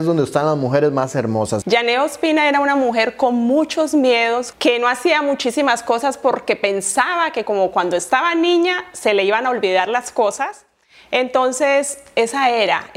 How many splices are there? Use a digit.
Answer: 2